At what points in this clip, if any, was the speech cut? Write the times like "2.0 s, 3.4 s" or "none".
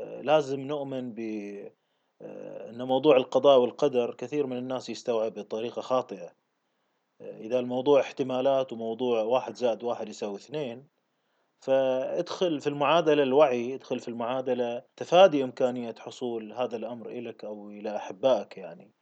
14.9 s